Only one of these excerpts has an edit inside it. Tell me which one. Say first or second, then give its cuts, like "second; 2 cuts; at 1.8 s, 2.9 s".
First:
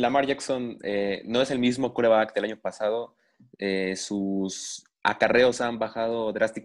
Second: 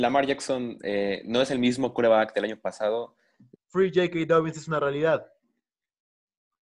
second; 1 cut; at 3.6 s